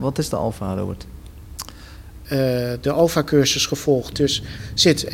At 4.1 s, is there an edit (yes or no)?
yes